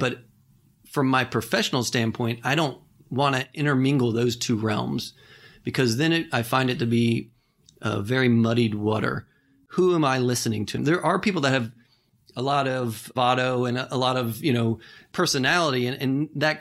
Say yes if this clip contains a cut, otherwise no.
yes